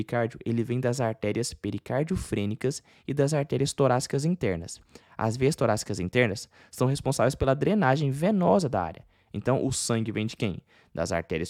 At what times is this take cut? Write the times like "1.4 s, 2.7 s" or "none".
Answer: none